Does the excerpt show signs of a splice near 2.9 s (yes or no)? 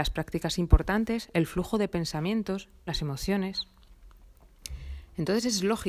yes